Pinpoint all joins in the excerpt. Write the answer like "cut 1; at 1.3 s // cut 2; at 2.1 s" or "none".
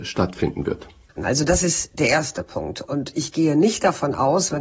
cut 1; at 1.2 s // cut 2; at 2.8 s